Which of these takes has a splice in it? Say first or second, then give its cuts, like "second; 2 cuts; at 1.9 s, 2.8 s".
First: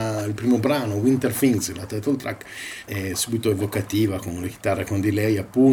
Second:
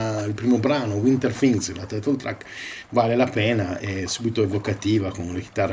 first; 1 cut; at 2.9 s